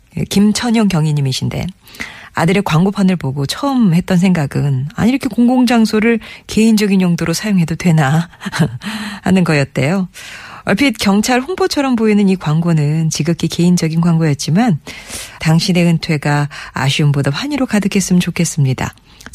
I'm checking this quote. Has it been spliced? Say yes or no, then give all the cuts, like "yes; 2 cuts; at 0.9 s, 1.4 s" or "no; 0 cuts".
yes; 1 cut; at 15.4 s